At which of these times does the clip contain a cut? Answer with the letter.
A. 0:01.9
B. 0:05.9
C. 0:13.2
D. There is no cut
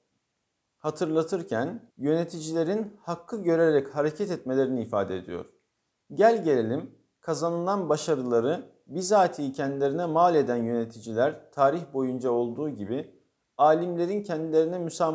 A